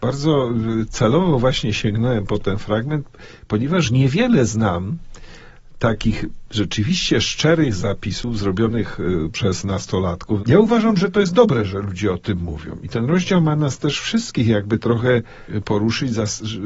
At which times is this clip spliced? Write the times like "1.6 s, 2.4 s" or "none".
10.4 s